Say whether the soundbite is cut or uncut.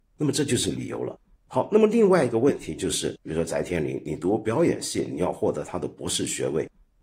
uncut